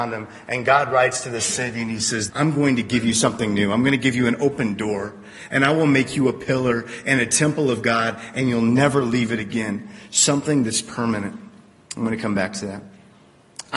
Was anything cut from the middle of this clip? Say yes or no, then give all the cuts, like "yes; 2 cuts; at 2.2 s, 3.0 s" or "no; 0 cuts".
yes; 1 cut; at 2.3 s